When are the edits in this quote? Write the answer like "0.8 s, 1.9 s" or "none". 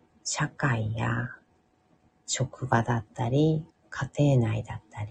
3.7 s